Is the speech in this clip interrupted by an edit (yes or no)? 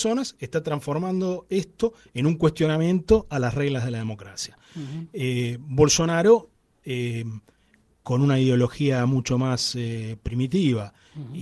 no